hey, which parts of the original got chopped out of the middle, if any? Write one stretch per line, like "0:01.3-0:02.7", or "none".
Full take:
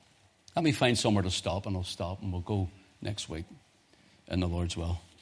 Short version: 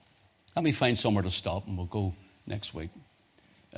0:01.6-0:02.2